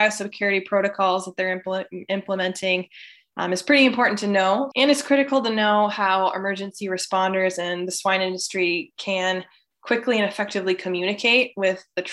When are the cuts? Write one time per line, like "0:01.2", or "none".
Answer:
0:04.7